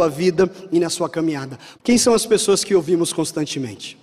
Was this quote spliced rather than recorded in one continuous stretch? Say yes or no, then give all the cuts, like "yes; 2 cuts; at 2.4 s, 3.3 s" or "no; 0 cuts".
yes; 1 cut; at 1.8 s